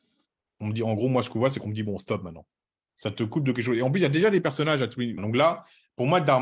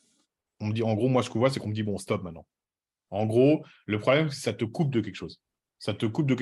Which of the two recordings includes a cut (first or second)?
first